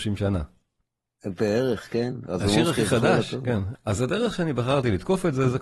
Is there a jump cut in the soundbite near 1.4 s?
no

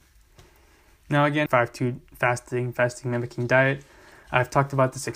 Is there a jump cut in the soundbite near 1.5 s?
yes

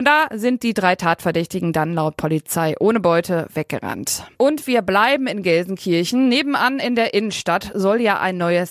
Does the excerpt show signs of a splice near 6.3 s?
no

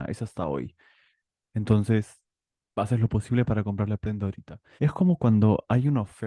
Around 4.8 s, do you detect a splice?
yes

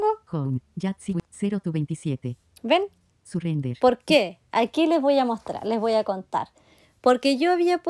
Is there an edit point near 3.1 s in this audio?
yes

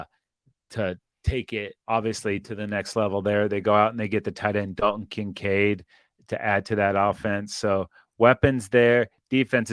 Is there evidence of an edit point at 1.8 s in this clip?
yes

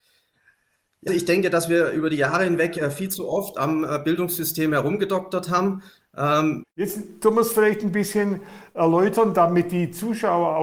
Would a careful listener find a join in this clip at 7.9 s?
no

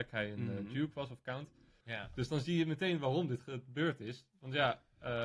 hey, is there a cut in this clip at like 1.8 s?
yes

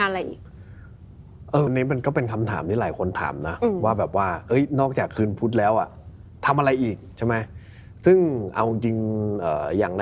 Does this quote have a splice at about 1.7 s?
yes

